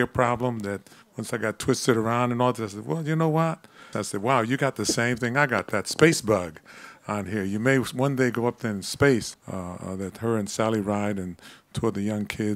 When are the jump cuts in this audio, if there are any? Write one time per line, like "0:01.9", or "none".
0:03.9
0:09.3